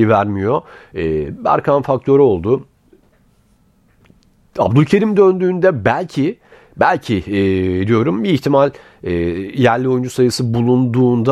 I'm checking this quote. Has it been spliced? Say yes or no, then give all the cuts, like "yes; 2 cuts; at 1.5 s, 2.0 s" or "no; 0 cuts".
no; 0 cuts